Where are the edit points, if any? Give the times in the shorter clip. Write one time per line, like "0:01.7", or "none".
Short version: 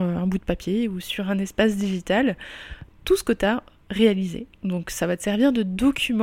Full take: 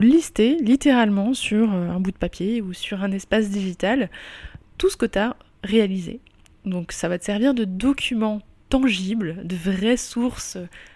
0:04.6